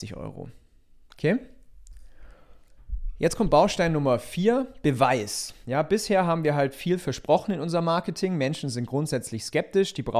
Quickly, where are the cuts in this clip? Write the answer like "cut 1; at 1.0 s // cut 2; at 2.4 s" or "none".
none